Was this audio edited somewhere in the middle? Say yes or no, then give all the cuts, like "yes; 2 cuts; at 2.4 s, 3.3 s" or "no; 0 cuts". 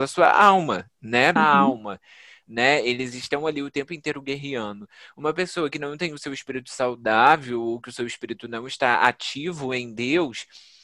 yes; 1 cut; at 1.4 s